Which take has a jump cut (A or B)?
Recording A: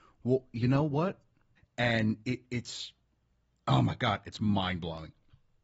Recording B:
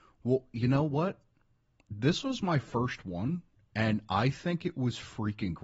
A